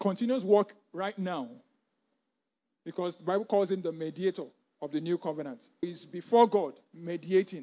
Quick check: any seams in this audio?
yes; 1 cut; at 5.8 s

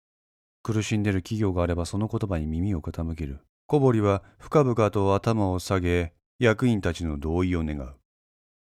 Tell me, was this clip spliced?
yes; 1 cut; at 3.5 s

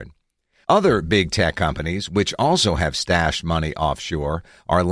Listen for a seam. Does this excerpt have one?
no; 0 cuts

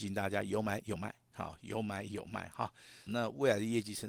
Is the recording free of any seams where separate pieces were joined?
no; 1 cut; at 3.1 s

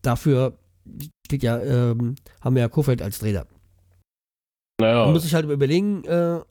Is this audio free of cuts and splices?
yes; 0 cuts

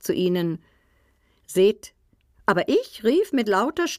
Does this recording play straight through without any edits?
no; 1 cut; at 2.3 s

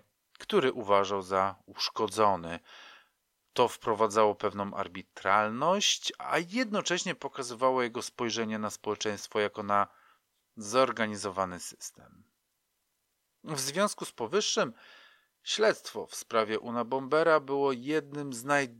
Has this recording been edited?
no; 0 cuts

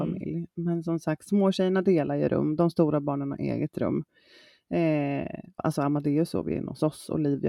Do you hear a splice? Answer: yes; 1 cut; at 5.6 s

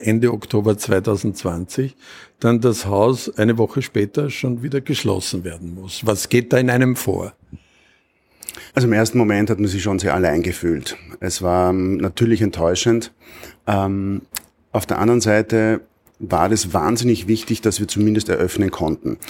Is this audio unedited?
no; 1 cut; at 8.7 s

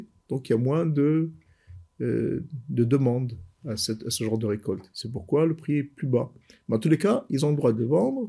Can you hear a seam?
no; 0 cuts

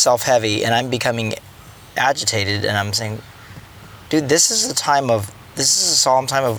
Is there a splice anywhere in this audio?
no; 0 cuts

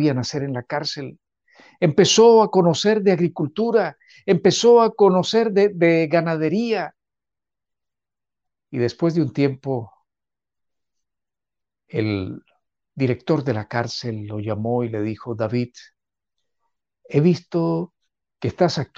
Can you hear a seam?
no; 0 cuts

